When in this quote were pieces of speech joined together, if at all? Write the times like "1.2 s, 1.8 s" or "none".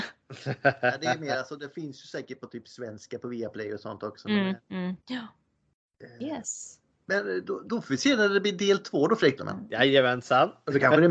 5.0 s, 9.4 s